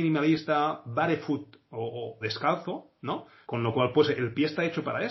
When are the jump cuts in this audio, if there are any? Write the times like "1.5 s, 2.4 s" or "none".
2.2 s, 3.4 s